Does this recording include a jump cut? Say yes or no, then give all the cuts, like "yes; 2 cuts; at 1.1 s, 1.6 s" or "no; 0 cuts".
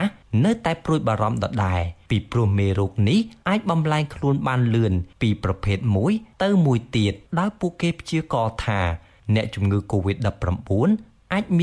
no; 0 cuts